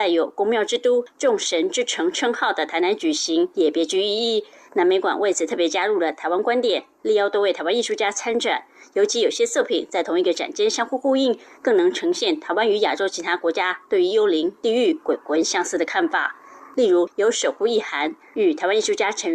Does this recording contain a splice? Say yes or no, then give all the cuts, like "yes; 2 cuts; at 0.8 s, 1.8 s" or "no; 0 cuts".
yes; 1 cut; at 17.1 s